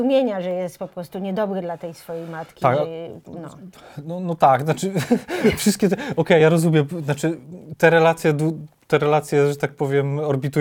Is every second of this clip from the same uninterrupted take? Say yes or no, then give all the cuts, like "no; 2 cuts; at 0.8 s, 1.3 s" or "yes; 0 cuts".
yes; 0 cuts